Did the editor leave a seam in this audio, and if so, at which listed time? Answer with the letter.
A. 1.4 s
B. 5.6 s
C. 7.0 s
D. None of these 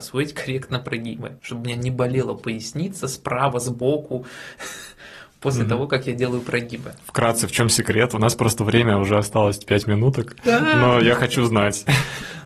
A